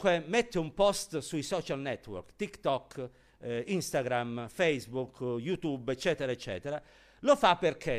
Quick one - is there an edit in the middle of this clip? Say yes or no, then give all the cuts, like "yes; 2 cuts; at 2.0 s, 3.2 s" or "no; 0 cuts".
no; 0 cuts